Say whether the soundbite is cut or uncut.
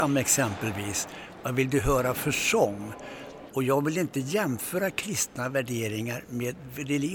cut